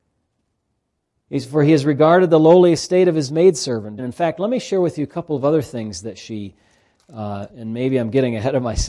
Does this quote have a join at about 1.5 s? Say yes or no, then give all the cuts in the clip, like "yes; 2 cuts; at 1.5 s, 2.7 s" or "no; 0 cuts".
no; 2 cuts; at 4.0 s, 7.5 s